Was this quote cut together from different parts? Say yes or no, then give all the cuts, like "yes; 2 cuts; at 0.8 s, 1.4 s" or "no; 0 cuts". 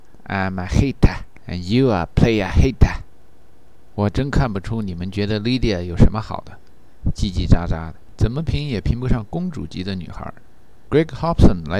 yes; 1 cut; at 10.9 s